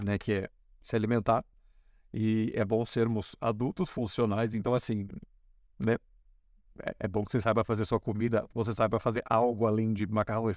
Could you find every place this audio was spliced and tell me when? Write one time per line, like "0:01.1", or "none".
none